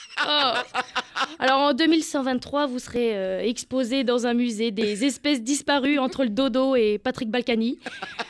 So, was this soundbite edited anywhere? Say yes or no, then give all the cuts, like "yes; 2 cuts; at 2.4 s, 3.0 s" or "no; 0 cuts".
no; 0 cuts